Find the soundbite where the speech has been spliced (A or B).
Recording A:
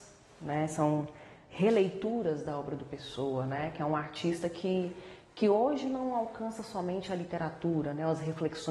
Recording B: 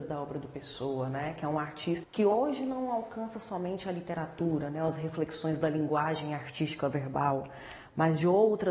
B